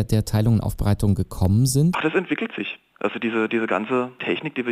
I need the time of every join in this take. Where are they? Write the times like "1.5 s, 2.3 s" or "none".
1.9 s